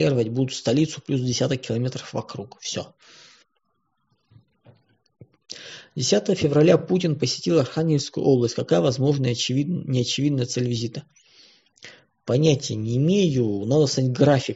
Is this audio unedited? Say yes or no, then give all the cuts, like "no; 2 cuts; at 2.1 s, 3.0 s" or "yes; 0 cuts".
yes; 0 cuts